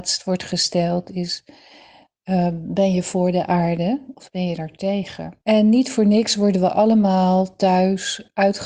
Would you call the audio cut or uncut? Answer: cut